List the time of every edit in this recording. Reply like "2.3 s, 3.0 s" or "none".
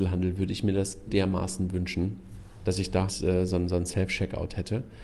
1.1 s, 3.1 s